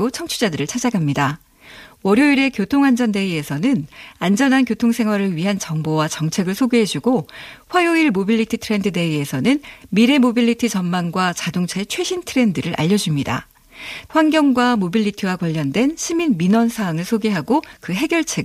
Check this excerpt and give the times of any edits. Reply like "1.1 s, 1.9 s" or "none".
14.0 s